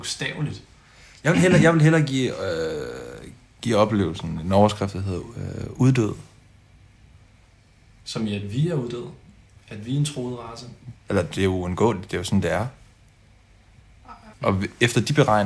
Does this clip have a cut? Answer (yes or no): yes